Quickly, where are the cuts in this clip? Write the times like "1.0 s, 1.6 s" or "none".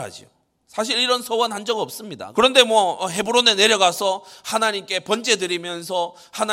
2.3 s